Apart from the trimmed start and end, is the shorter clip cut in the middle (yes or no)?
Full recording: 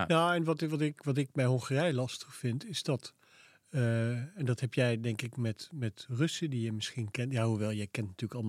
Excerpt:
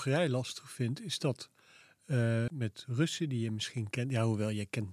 yes